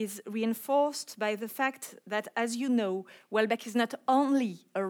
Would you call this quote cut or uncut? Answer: uncut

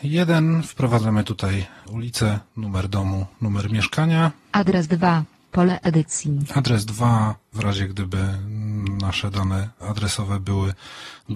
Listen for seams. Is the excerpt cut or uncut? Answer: uncut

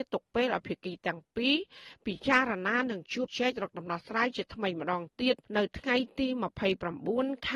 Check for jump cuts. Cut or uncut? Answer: cut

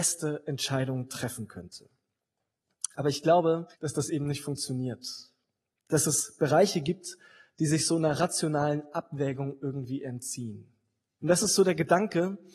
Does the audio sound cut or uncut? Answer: cut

